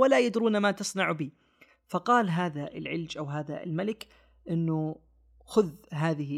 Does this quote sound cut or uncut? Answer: uncut